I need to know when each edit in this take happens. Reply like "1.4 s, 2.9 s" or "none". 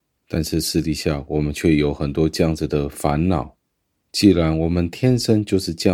none